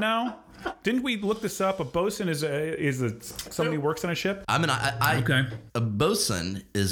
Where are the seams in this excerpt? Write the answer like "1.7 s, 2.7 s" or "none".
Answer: 4.5 s, 5.7 s